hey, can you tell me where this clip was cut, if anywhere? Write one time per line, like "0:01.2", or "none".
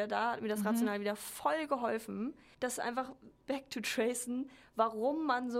0:03.4